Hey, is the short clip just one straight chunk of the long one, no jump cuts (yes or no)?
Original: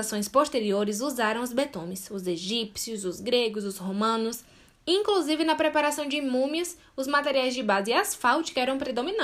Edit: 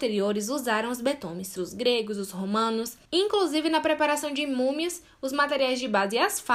no